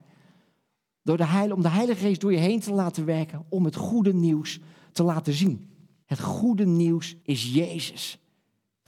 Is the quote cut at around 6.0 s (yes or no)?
yes